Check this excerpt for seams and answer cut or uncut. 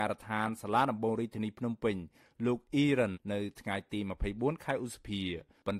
cut